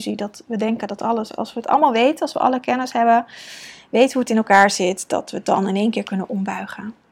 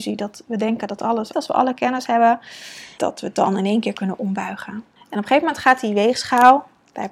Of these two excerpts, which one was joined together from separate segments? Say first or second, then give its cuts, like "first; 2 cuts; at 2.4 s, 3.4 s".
second; 3 cuts; at 1.3 s, 3.0 s, 5.0 s